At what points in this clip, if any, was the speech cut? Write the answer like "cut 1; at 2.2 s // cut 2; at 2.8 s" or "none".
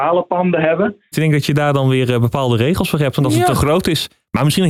cut 1; at 1.1 s